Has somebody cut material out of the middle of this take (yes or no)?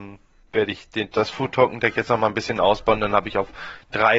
no